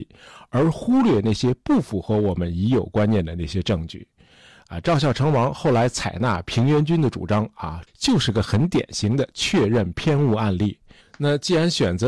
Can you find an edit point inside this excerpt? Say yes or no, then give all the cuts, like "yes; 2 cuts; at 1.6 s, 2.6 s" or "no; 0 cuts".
yes; 2 cuts; at 7.9 s, 11.0 s